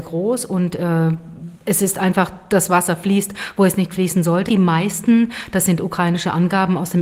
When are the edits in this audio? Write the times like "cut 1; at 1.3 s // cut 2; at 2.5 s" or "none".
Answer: cut 1; at 4.5 s